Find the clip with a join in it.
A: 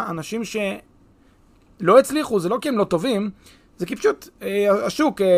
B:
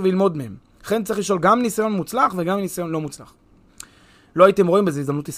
B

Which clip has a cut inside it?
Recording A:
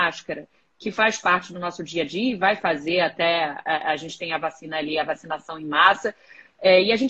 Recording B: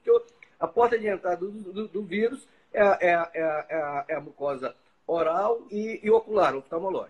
B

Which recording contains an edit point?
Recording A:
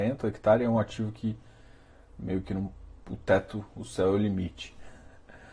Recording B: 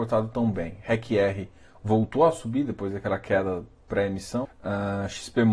B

